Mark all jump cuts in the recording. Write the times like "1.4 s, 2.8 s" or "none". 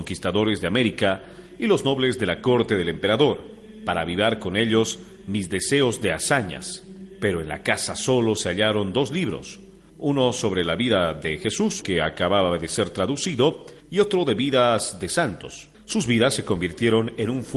11.8 s, 15.7 s

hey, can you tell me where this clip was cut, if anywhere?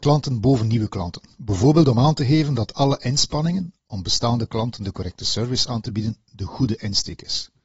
none

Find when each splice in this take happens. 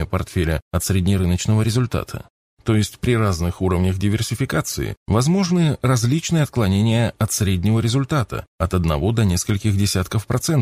none

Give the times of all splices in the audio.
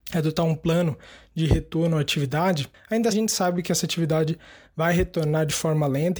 3.1 s

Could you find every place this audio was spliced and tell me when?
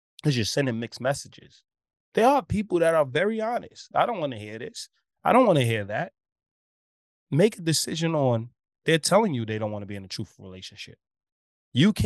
3.9 s

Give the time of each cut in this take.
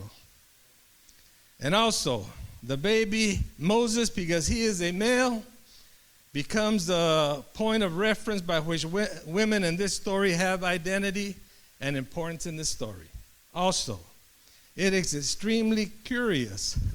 13.4 s

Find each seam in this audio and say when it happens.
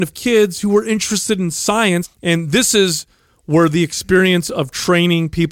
2.0 s

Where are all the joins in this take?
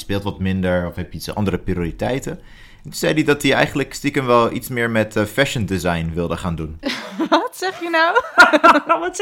none

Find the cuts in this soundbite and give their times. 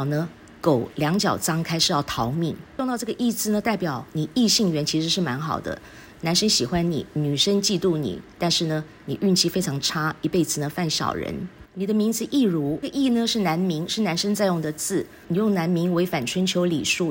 11.7 s, 15.2 s

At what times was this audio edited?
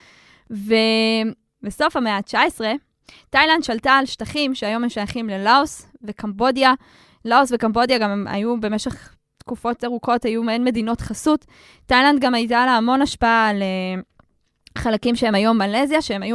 none

